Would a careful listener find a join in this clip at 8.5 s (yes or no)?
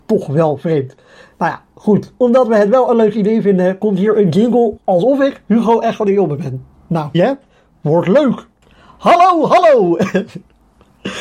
no